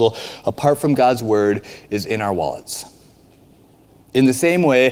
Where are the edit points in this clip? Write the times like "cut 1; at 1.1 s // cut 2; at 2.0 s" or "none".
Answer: cut 1; at 4.0 s